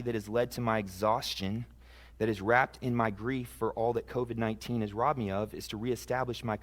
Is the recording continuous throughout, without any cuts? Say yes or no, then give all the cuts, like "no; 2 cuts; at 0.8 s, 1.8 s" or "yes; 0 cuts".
no; 1 cut; at 2.1 s